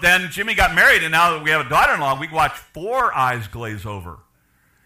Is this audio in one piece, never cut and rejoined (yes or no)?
yes